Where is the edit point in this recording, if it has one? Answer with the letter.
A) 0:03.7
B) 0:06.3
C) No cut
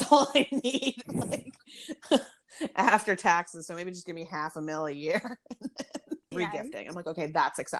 B